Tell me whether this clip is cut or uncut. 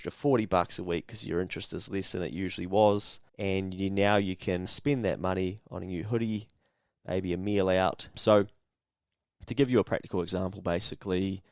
cut